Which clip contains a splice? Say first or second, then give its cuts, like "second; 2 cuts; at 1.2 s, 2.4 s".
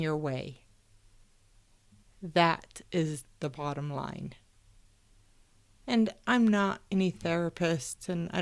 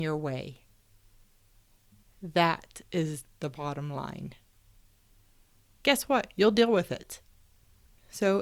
second; 1 cut; at 5.8 s